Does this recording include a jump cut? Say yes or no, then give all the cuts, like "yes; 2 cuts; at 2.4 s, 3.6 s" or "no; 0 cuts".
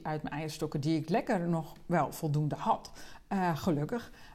no; 0 cuts